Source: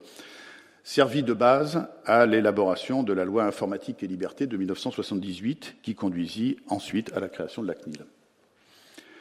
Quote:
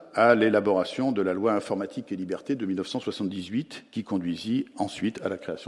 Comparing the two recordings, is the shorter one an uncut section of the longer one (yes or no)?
yes